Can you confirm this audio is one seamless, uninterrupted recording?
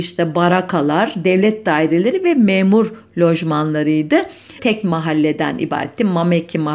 no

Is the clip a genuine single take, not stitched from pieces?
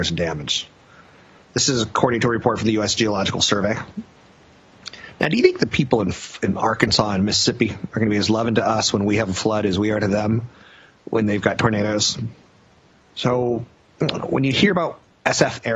yes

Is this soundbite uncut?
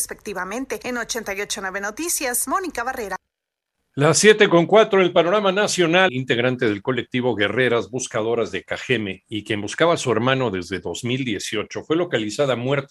no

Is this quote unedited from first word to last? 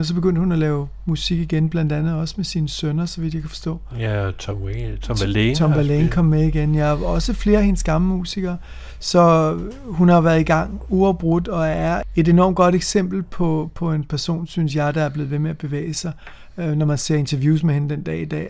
yes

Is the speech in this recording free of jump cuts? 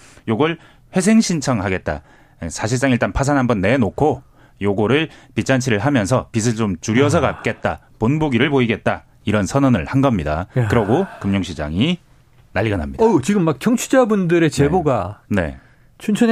yes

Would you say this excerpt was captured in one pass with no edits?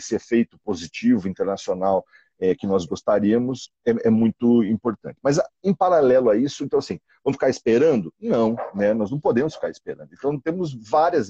yes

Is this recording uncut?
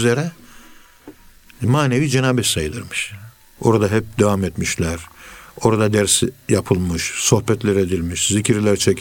no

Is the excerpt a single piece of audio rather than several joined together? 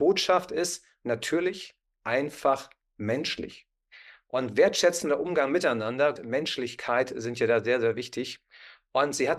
no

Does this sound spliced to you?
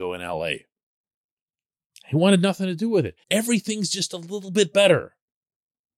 yes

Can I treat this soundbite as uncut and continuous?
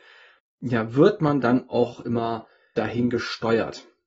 no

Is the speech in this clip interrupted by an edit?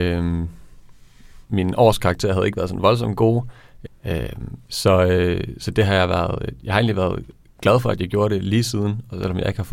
yes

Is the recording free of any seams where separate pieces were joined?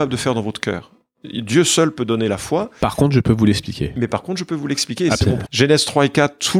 no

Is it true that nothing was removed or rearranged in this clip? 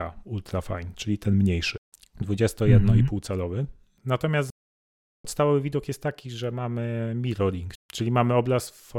yes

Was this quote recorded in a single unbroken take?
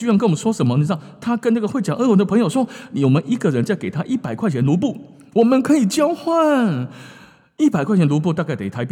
yes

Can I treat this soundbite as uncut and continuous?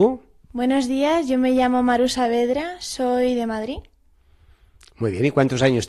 yes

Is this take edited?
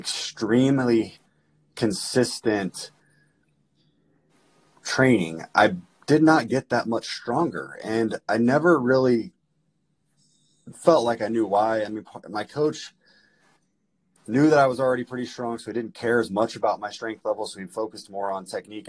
no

